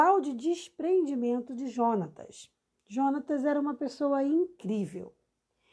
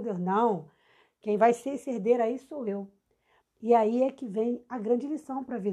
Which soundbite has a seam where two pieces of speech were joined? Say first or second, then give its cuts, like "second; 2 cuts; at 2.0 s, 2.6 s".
second; 1 cut; at 3.4 s